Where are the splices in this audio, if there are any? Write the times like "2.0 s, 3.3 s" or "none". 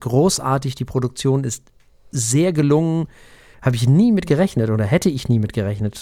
3.5 s